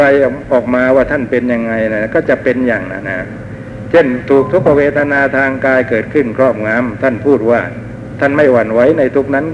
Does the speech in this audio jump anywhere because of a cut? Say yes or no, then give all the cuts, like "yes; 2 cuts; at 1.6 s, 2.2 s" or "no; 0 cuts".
yes; 1 cut; at 3.0 s